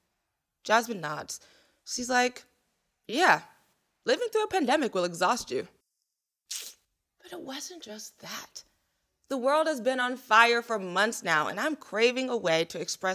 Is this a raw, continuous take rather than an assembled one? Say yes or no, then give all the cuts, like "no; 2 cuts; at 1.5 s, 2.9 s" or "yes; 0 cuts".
yes; 0 cuts